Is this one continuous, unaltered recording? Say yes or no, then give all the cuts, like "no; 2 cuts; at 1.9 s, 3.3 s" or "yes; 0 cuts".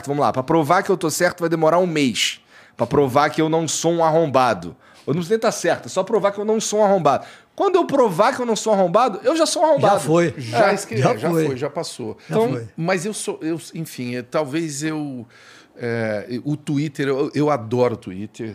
yes; 0 cuts